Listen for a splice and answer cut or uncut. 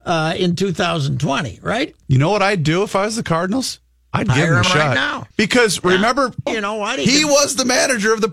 cut